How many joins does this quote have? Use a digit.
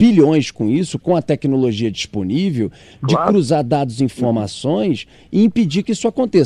1